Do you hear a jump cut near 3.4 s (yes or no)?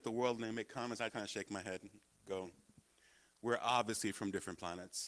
no